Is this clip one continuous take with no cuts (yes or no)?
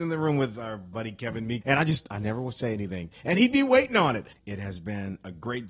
no